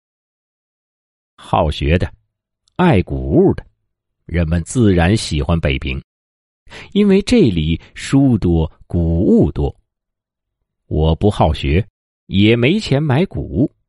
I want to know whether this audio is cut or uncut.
uncut